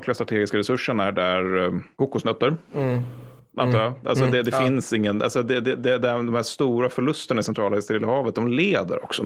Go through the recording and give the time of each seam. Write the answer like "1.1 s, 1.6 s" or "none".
none